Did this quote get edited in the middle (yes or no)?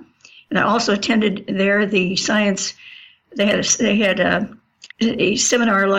yes